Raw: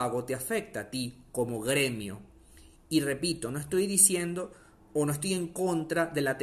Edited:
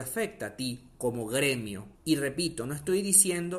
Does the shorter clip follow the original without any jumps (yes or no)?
no